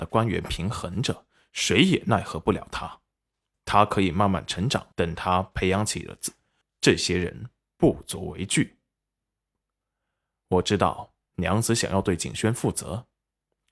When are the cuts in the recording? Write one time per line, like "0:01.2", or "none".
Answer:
0:04.9
0:06.6